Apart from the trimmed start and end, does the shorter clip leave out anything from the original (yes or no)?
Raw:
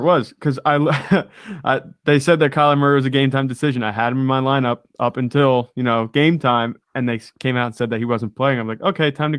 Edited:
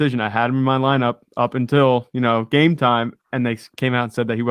no